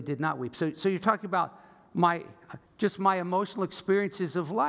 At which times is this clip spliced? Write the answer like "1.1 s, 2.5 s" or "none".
2.7 s

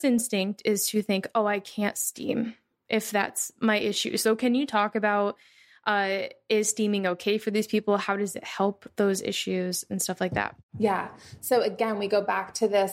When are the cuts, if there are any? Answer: none

